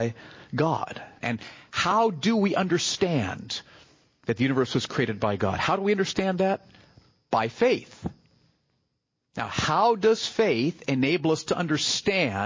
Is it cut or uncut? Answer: cut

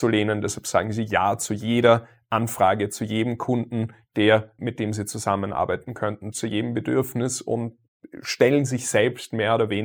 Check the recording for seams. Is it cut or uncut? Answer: cut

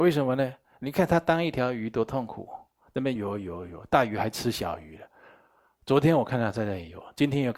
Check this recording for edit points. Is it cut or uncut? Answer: cut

